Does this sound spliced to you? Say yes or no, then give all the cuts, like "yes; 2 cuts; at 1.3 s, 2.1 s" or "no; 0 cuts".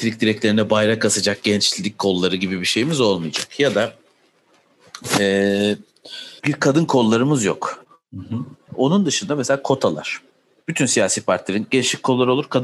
yes; 3 cuts; at 6.4 s, 8.7 s, 10.6 s